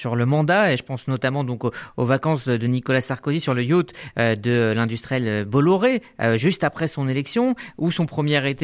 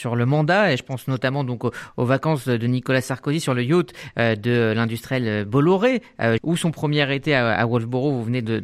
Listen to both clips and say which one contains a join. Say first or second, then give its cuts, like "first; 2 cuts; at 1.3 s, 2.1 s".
second; 1 cut; at 6.4 s